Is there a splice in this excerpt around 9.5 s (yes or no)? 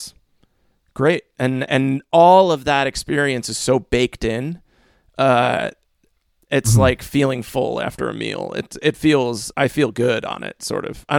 yes